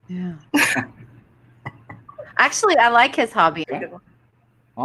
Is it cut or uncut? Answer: cut